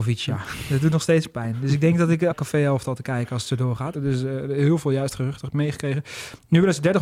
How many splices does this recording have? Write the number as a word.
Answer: two